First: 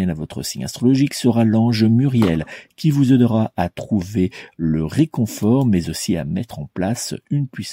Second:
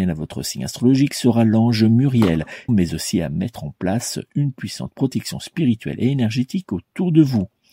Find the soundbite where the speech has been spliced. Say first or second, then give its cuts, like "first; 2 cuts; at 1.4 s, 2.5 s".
second; 1 cut; at 2.7 s